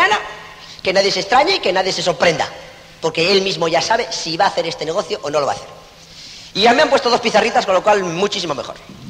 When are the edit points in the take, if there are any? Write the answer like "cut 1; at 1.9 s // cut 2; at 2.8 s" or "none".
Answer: none

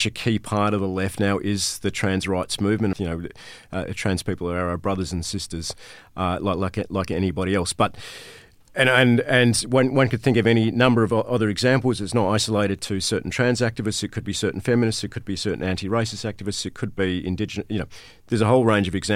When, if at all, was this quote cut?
cut 1; at 2.9 s

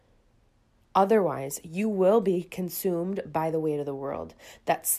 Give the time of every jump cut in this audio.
none

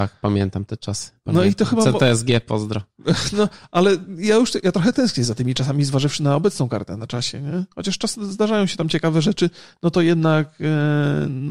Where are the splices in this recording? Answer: none

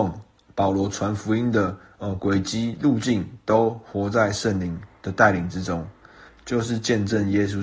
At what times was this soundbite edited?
cut 1; at 6.3 s

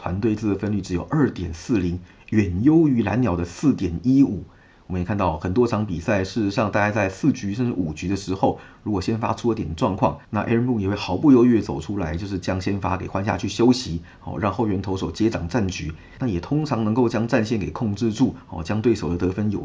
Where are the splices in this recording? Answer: none

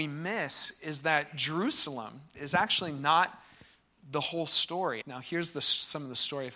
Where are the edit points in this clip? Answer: cut 1; at 2.3 s // cut 2; at 5.0 s

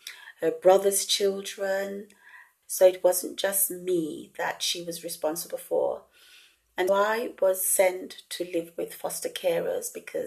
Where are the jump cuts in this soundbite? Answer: cut 1; at 2.6 s // cut 2; at 6.9 s

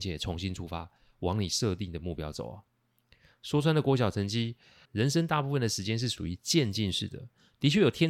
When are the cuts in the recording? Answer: cut 1; at 4.8 s

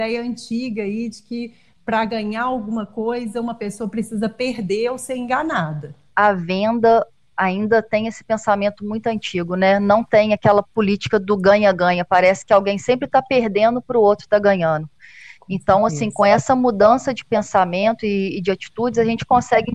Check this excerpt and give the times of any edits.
none

